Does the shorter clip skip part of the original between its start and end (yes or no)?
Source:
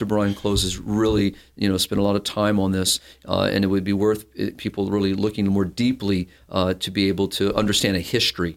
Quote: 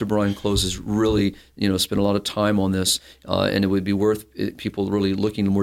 no